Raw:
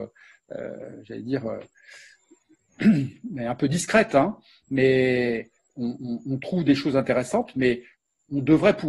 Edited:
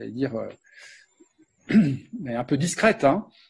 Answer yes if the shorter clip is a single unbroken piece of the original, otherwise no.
yes